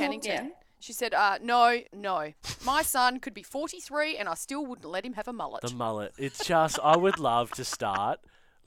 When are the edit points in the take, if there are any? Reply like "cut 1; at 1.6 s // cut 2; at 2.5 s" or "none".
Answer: cut 1; at 1.9 s